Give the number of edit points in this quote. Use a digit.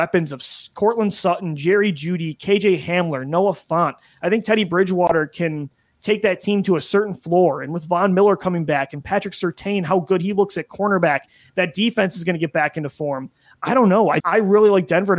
1